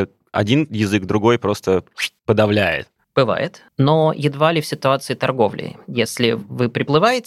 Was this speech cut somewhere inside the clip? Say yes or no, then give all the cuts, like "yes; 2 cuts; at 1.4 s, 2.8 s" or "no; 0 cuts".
yes; 1 cut; at 2.2 s